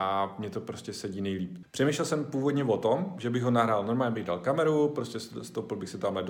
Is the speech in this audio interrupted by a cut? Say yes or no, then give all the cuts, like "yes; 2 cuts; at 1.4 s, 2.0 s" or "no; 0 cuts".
yes; 1 cut; at 1.6 s